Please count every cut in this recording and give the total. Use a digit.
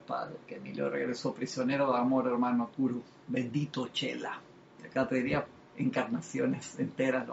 2